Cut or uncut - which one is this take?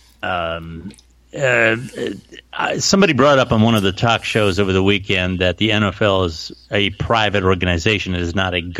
uncut